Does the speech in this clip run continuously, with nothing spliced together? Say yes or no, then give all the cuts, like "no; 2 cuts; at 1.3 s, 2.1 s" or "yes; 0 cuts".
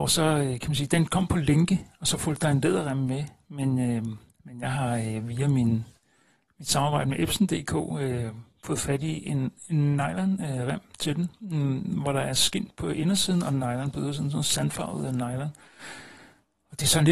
yes; 0 cuts